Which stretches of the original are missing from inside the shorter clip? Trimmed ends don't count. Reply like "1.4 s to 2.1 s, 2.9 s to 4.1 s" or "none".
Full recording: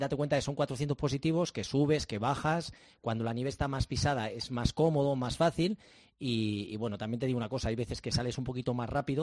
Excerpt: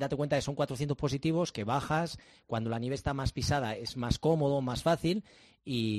1.5 s to 2.1 s

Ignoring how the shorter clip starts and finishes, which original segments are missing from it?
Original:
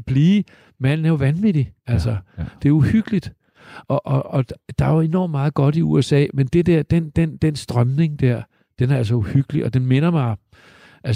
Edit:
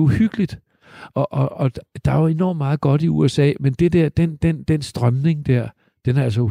none

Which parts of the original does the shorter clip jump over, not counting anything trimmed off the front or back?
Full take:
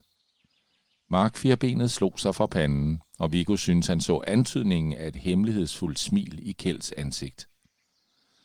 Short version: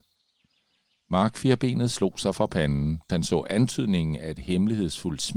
3.1 s to 3.9 s

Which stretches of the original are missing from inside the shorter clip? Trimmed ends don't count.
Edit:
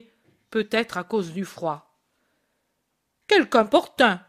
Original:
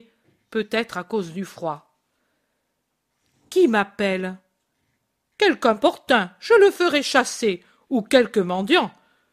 3.1 s to 5.2 s

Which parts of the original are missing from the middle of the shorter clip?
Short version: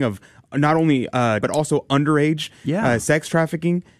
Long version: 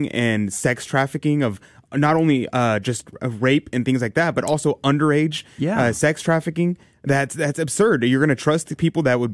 2.8 s to 4.3 s

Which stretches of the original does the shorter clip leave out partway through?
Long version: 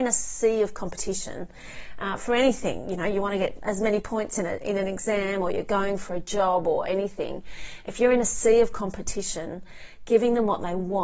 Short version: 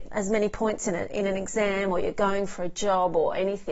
none

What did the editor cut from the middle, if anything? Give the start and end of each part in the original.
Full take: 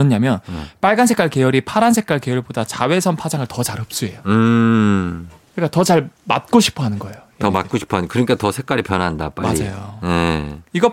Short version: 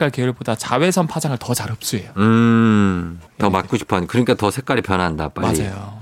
5.4 s to 7.3 s

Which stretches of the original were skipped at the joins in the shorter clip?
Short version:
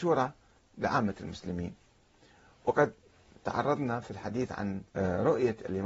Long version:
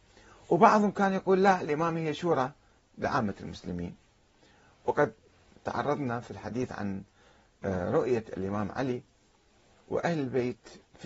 7.1 s to 7.6 s

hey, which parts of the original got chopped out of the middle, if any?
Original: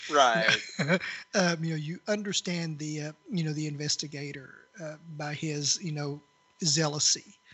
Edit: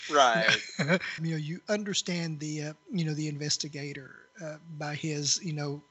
1.2 s to 1.6 s

